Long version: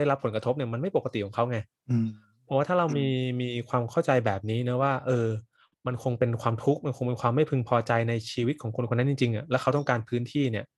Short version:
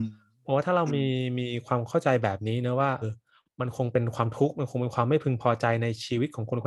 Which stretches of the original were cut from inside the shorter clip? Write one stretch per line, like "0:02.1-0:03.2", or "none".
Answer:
0:05.0-0:05.3